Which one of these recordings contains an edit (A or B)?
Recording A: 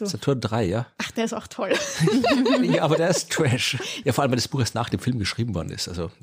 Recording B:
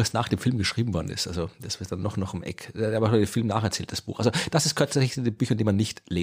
A